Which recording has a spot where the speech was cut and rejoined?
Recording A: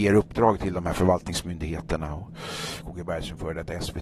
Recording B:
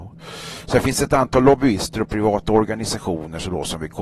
A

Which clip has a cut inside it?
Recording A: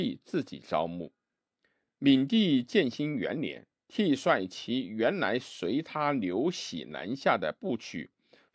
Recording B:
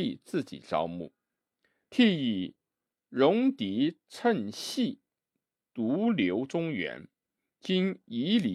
B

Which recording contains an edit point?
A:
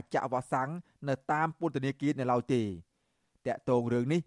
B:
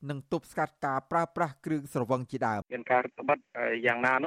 B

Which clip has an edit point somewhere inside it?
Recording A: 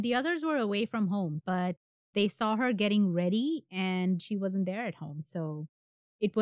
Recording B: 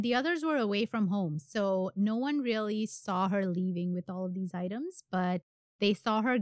A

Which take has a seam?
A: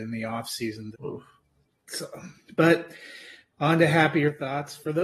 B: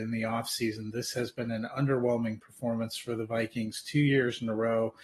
A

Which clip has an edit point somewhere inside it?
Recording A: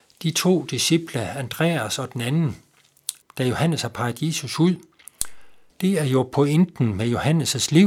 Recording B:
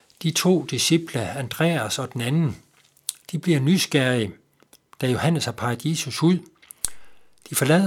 A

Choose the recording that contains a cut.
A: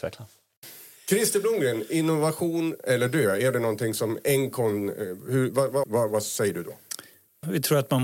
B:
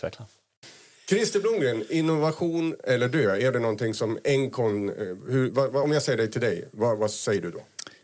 A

